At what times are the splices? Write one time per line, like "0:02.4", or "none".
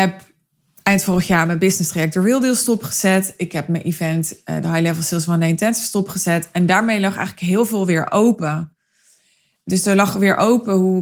none